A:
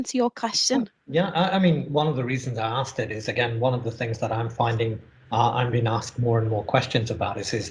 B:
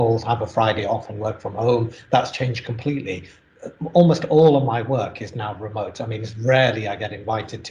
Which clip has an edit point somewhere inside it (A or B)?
A